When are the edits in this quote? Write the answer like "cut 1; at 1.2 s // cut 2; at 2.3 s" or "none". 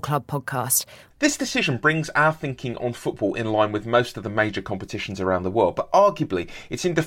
cut 1; at 1.1 s